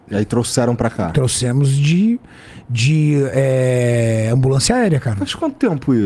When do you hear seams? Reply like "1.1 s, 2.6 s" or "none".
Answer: none